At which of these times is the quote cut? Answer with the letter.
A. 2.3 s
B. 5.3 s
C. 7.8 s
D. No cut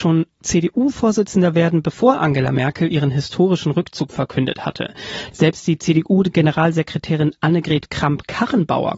B